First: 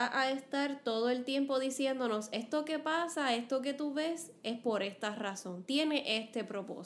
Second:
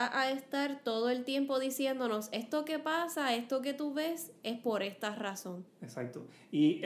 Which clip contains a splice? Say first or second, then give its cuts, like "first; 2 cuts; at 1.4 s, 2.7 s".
second; 1 cut; at 5.7 s